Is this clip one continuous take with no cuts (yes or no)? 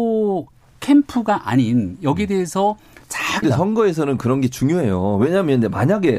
no